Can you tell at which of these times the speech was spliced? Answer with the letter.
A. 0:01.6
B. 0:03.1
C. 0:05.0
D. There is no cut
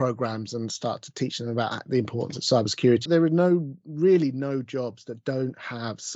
B